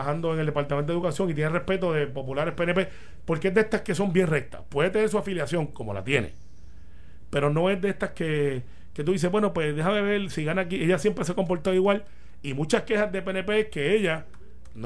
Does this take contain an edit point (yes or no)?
no